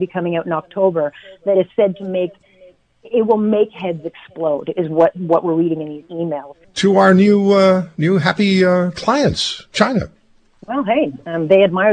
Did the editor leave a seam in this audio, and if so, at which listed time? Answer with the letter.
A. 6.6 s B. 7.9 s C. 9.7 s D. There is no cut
A